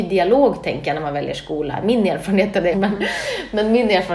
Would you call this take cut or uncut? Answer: cut